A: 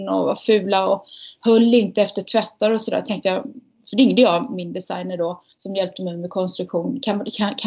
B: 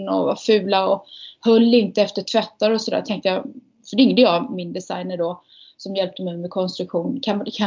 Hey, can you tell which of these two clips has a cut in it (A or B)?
A